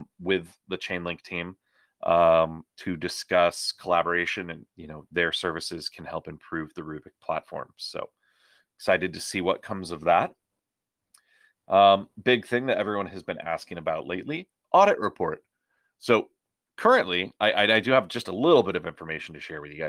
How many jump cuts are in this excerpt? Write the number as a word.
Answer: two